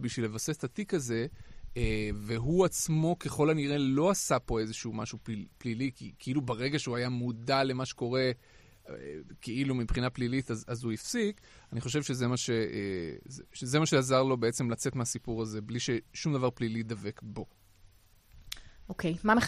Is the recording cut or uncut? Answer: uncut